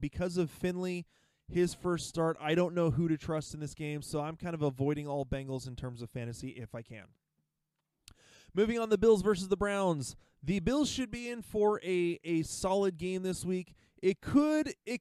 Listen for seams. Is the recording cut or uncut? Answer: uncut